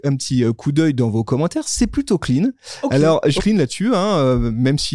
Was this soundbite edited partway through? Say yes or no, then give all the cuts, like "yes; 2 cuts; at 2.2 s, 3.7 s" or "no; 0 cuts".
yes; 1 cut; at 3.4 s